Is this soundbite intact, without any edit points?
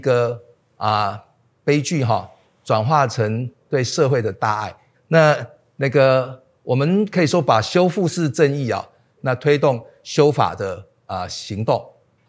no; 2 cuts; at 4.9 s, 9.2 s

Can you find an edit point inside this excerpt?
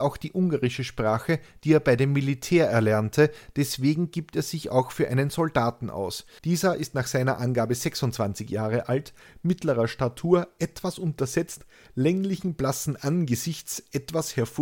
yes; 1 cut; at 6.4 s

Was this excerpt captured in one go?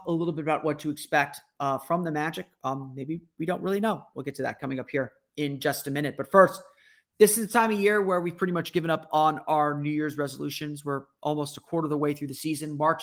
yes; 0 cuts

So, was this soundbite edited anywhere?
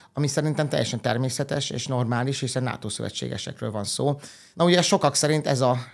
yes; 1 cut; at 4.5 s

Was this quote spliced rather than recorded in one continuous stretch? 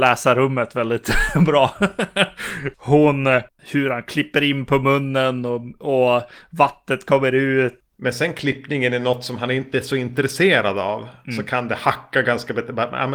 yes; 2 cuts; at 3.6 s, 7.8 s

